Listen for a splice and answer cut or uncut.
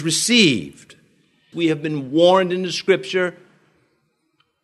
cut